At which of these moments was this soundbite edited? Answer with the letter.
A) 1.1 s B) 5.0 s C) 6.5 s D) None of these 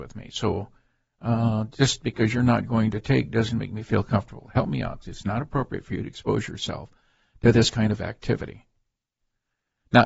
B